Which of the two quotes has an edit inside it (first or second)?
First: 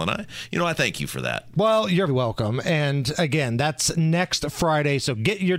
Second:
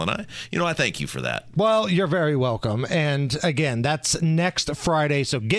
first